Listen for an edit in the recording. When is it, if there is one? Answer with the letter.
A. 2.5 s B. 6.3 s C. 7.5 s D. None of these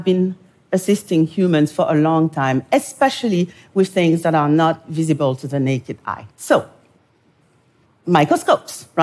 B